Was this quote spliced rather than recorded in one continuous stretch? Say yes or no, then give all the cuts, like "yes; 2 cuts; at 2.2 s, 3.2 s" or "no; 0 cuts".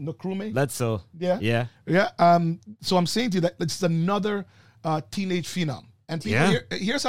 no; 0 cuts